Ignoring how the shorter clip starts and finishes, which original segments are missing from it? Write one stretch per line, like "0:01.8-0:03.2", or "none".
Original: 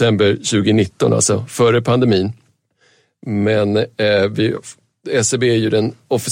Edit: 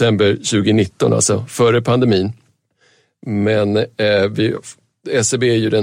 none